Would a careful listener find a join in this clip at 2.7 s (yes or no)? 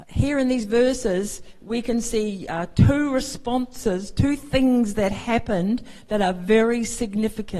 no